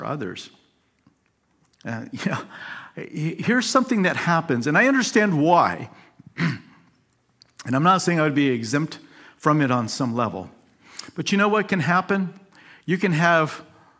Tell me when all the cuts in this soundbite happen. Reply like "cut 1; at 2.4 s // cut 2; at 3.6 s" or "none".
none